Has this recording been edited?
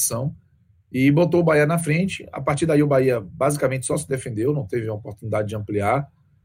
no; 0 cuts

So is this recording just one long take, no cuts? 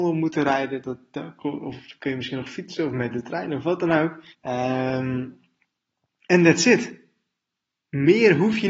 no; 1 cut; at 4.3 s

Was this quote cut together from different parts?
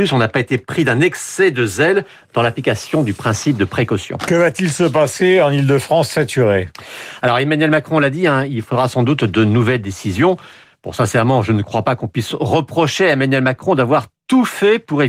no; 0 cuts

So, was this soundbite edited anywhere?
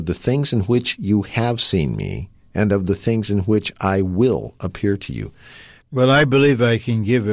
yes; 1 cut; at 5.8 s

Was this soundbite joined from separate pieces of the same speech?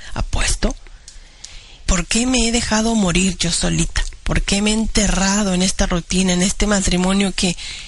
yes; 1 cut; at 1.9 s

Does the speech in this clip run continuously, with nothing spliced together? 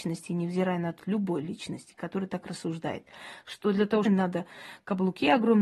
no; 2 cuts; at 1.0 s, 4.1 s

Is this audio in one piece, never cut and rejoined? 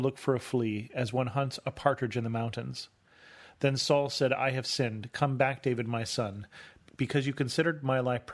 yes; 0 cuts

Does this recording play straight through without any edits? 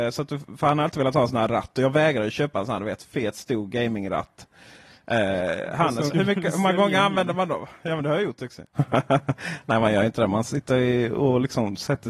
no; 2 cuts; at 6.1 s, 8.7 s

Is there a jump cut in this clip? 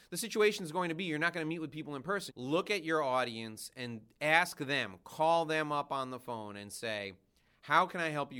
yes; 1 cut; at 2.3 s

